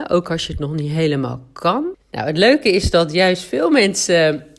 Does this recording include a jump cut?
yes; 1 cut; at 1.9 s

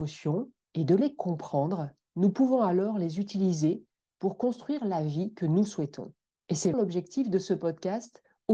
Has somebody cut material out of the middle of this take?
yes; 1 cut; at 6.7 s

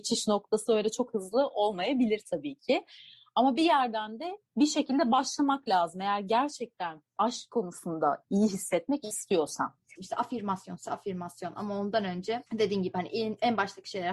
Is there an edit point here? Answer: yes; 2 cuts; at 10.0 s, 12.5 s

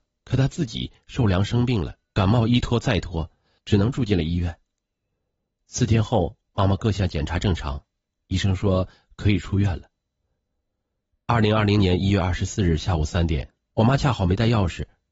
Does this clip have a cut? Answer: yes; 3 cuts; at 2.0 s, 3.6 s, 13.7 s

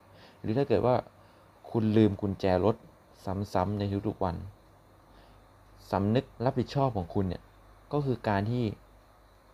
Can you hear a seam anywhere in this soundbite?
yes; 1 cut; at 6.3 s

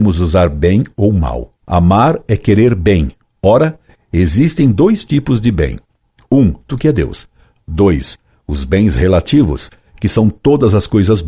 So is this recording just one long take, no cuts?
no; 2 cuts; at 1.6 s, 6.7 s

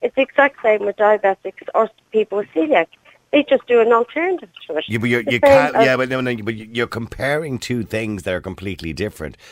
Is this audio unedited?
yes; 0 cuts

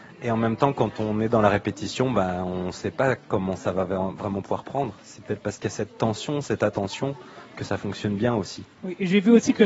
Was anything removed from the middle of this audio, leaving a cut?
no; 0 cuts

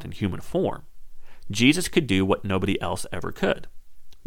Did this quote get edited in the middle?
no; 0 cuts

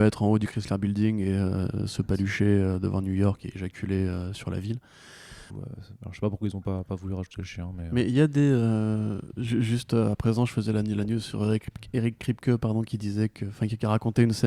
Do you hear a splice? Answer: yes; 1 cut; at 5.5 s

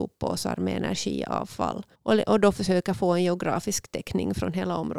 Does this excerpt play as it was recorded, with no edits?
no; 1 cut; at 1.9 s

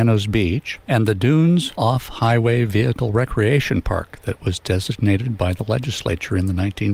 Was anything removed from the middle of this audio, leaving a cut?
no; 0 cuts

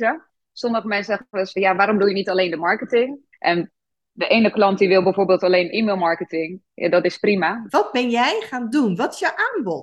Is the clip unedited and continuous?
no; 2 cuts; at 3.3 s, 7.7 s

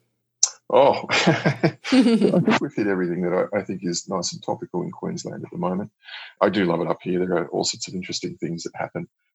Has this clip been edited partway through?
no; 0 cuts

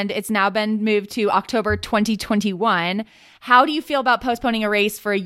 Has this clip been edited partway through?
no; 0 cuts

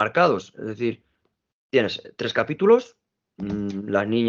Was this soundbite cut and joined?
no; 0 cuts

